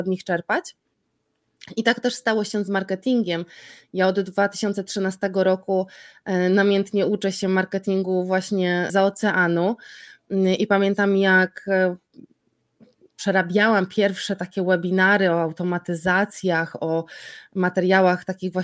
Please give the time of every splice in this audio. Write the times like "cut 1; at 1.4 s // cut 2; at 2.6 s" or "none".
cut 1; at 8.9 s